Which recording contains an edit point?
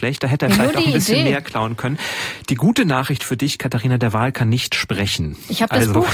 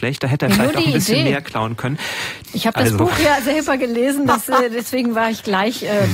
second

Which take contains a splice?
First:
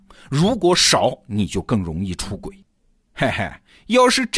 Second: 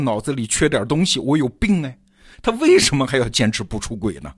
second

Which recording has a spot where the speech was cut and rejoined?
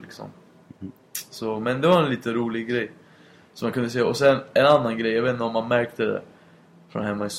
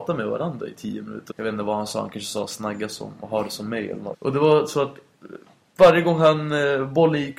second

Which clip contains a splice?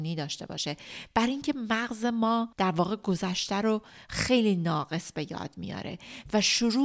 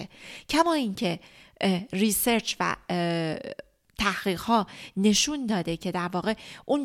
first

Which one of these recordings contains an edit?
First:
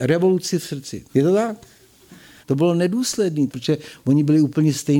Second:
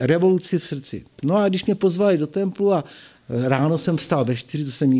first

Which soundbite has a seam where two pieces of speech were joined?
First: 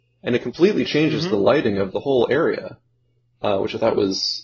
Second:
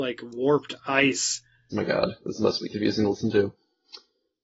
second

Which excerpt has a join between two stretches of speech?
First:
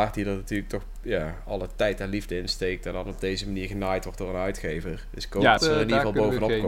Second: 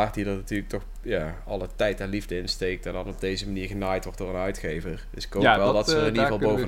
first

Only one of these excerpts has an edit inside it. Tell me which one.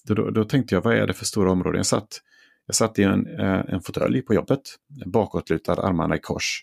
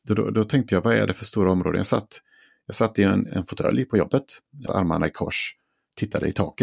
second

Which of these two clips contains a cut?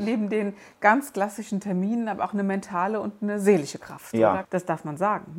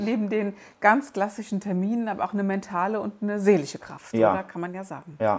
first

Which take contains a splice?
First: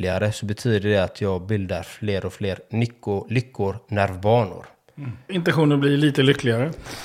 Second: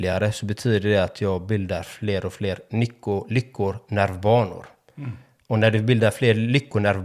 first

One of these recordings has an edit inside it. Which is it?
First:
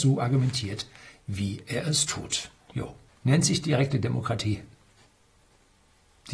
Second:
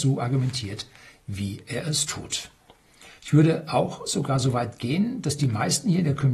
first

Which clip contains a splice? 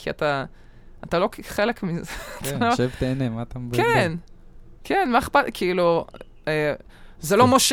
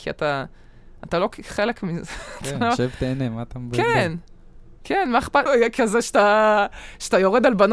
second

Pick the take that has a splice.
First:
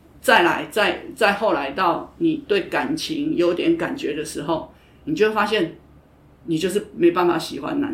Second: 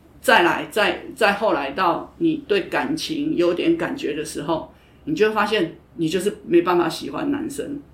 second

